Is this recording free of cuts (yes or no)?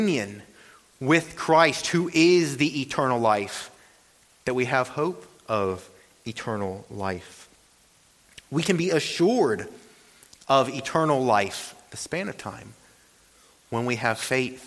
yes